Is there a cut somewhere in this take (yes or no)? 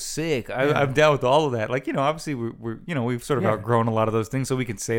no